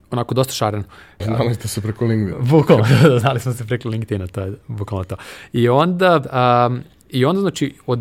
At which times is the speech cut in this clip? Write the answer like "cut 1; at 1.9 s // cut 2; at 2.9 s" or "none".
cut 1; at 1.2 s